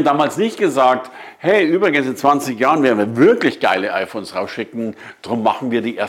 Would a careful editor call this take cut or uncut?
uncut